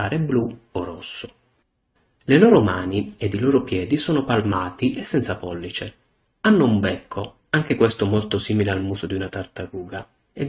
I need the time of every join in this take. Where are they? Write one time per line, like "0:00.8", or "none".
none